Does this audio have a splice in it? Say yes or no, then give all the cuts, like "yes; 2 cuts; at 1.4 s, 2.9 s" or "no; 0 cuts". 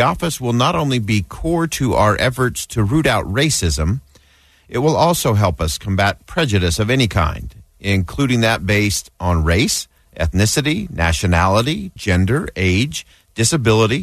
yes; 1 cut; at 12.0 s